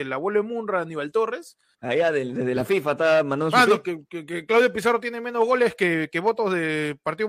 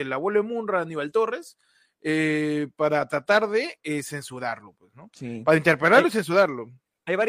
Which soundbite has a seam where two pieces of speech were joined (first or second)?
first